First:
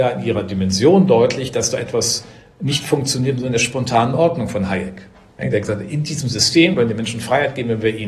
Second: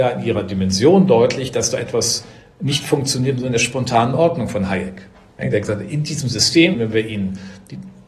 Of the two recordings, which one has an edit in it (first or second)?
second